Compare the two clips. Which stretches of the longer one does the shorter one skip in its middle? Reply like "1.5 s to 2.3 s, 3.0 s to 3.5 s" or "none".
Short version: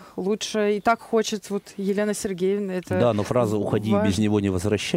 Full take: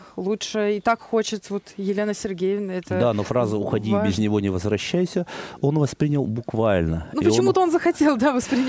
none